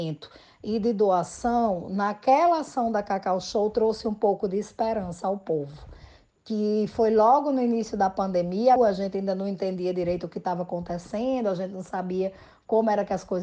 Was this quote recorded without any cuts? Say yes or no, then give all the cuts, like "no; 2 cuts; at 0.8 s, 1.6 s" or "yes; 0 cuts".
no; 1 cut; at 8.8 s